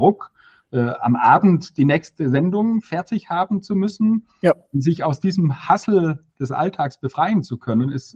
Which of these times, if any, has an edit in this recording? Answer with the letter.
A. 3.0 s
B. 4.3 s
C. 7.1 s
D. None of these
D